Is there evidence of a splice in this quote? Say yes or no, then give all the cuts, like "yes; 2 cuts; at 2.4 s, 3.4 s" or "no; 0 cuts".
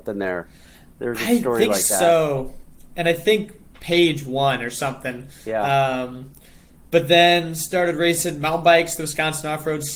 no; 0 cuts